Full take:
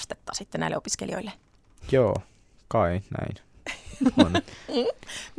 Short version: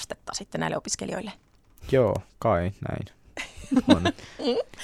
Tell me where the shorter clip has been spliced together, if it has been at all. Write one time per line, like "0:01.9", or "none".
0:02.3

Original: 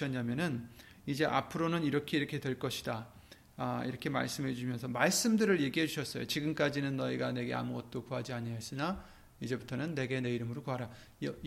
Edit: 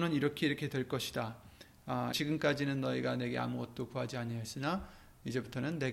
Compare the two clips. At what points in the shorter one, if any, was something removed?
0:02.1

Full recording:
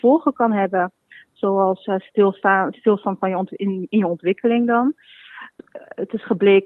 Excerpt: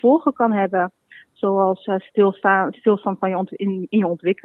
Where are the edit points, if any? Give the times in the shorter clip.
none

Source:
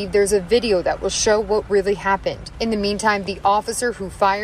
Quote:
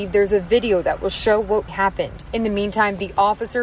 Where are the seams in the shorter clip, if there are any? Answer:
0:01.7

